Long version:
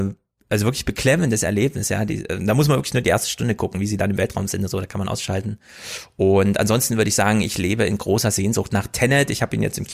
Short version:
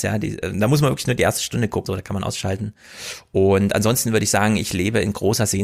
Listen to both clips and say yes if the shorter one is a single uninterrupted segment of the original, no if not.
no